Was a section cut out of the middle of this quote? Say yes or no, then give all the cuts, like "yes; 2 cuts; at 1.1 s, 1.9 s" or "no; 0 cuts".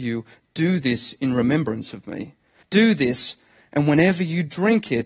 yes; 1 cut; at 2.6 s